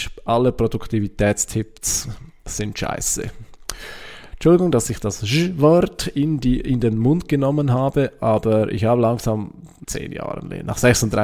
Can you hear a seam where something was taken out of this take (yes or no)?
yes